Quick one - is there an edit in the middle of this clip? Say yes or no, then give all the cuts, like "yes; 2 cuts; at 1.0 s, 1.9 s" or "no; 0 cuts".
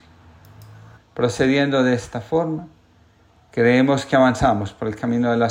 yes; 1 cut; at 1.0 s